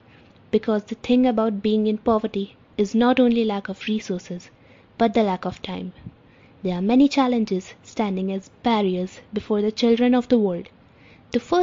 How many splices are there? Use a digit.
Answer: 1